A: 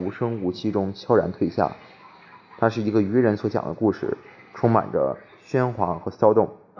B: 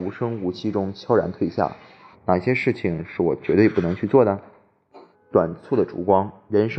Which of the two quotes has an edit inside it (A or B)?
B